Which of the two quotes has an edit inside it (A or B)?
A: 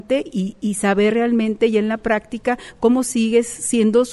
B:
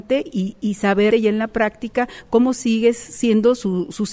B